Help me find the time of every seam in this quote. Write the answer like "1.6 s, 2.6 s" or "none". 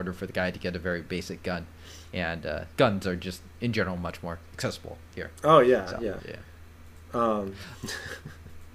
2.8 s, 6.2 s